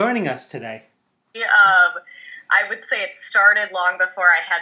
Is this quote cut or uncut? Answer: cut